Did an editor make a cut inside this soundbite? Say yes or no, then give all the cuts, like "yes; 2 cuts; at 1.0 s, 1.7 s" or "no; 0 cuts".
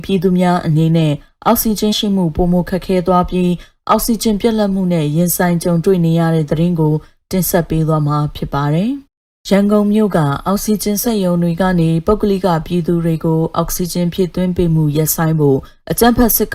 yes; 2 cuts; at 1.9 s, 9.1 s